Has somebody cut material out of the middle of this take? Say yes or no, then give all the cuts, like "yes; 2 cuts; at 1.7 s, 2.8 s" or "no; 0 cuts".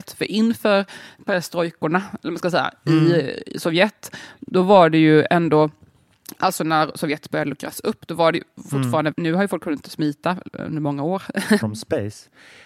yes; 2 cuts; at 9.1 s, 11.6 s